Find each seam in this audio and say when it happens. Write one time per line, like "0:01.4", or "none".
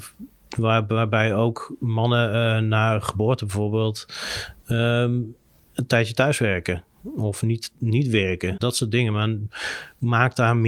none